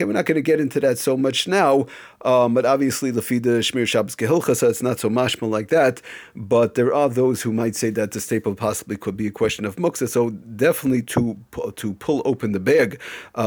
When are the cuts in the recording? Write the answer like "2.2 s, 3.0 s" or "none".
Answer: none